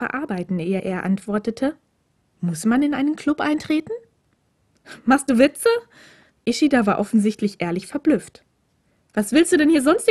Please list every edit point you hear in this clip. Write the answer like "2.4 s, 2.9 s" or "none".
none